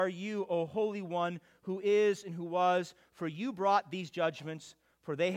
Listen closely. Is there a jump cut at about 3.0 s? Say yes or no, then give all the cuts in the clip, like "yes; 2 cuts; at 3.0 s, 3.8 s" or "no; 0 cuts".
no; 0 cuts